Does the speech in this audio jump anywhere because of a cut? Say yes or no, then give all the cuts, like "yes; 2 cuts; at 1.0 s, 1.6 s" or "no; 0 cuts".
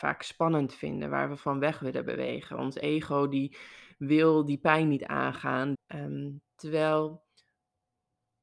yes; 1 cut; at 5.7 s